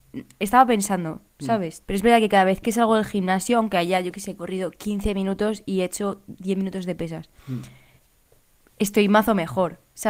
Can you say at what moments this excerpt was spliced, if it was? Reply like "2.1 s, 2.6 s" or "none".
1.8 s

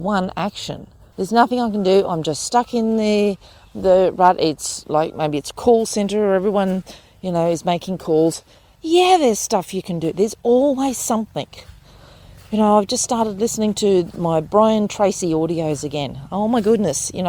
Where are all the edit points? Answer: 1.1 s

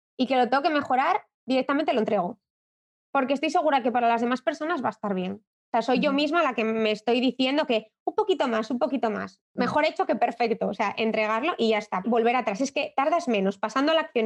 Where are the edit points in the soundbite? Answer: 9.4 s, 12.0 s

